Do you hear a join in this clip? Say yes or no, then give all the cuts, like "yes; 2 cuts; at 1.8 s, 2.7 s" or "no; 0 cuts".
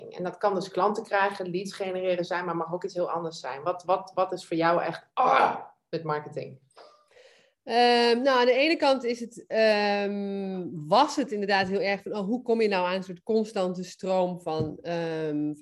no; 0 cuts